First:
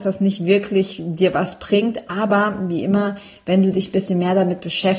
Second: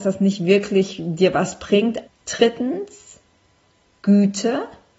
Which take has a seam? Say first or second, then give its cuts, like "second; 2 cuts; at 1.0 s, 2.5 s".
second; 1 cut; at 2.1 s